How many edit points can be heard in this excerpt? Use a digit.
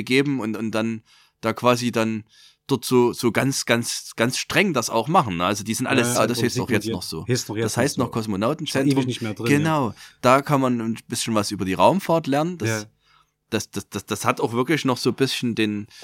1